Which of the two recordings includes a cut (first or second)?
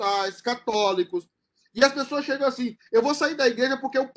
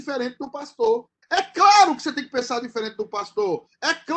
second